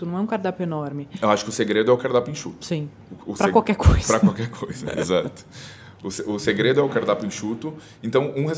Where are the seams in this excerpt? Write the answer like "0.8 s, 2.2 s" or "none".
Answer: none